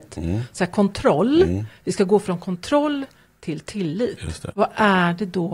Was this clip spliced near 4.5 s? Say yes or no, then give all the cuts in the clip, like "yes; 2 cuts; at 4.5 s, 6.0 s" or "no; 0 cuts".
yes; 1 cut; at 4.5 s